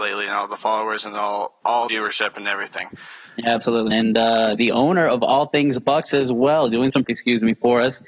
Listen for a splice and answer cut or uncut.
cut